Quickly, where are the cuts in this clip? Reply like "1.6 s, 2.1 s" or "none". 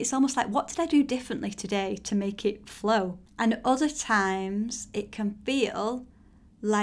3.3 s